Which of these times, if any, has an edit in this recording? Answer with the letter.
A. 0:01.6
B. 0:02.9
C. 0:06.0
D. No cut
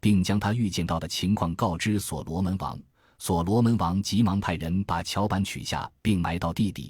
D